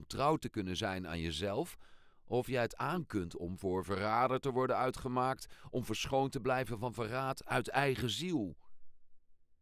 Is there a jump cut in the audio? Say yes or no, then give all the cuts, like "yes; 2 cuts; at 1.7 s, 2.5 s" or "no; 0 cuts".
no; 0 cuts